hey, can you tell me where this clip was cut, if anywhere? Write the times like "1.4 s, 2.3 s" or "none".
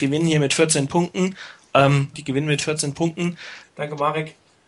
2.1 s, 3.6 s